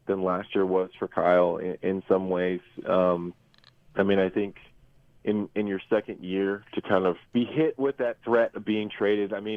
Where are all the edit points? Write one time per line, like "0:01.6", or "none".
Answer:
0:07.3